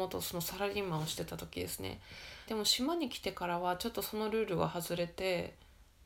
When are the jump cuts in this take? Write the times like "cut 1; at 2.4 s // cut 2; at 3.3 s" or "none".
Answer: cut 1; at 2.5 s